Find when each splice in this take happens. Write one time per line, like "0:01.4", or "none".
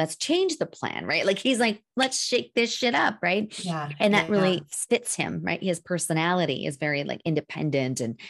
none